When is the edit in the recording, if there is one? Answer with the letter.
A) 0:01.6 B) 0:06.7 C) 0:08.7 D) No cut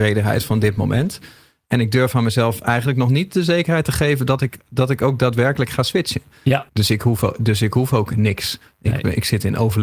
B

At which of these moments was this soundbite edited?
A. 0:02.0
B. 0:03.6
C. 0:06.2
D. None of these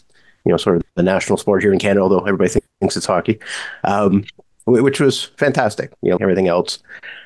C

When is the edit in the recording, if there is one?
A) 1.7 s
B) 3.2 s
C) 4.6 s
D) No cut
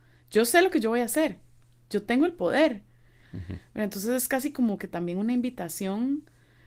B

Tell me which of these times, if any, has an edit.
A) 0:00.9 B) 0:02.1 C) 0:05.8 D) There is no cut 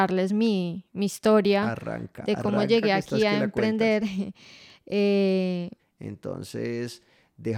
C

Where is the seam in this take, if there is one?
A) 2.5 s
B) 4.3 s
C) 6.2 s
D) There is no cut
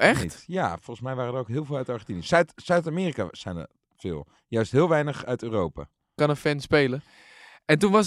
C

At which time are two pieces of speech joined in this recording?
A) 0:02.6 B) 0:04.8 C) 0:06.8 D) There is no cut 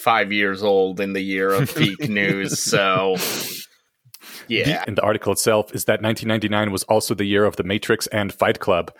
B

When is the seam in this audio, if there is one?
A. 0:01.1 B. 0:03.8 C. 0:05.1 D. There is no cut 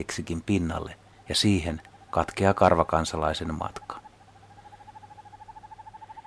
A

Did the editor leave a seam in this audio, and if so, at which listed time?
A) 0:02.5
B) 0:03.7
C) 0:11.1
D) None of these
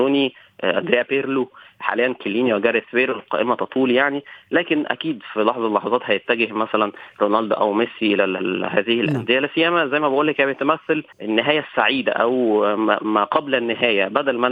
C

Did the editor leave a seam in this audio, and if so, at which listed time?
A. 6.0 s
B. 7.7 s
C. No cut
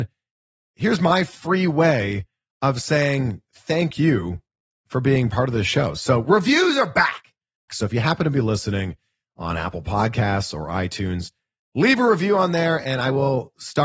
B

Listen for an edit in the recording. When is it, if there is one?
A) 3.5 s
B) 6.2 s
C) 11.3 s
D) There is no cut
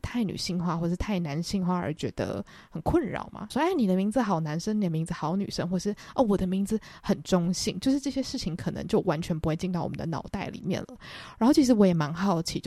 A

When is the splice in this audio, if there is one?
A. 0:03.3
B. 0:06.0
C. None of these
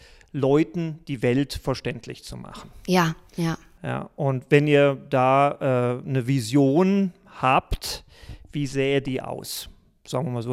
A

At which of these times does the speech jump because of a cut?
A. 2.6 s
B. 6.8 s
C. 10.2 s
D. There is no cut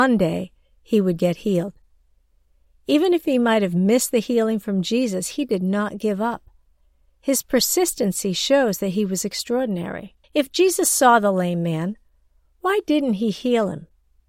C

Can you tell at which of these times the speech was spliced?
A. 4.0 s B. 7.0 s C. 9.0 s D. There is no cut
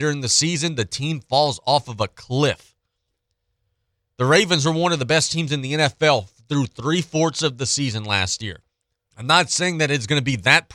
C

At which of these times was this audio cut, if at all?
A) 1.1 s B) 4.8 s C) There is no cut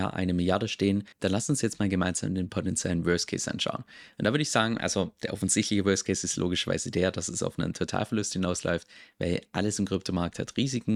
A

